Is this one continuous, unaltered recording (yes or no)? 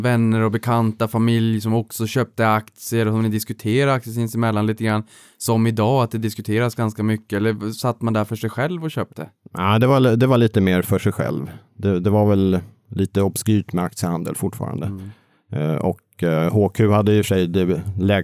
yes